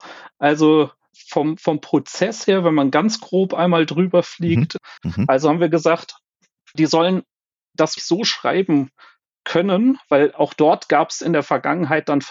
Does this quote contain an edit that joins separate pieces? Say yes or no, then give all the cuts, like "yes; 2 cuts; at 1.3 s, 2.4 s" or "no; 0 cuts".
yes; 2 cuts; at 5.0 s, 8.0 s